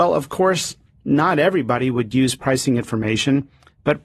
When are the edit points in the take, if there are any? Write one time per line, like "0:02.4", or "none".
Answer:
none